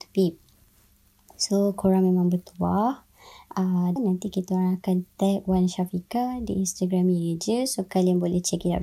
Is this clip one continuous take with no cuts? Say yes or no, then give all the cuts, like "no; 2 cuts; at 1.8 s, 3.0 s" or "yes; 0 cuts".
no; 1 cut; at 4.0 s